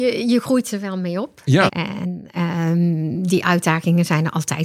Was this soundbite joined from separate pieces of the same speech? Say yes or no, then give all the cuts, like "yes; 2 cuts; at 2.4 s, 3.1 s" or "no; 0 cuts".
yes; 1 cut; at 1.7 s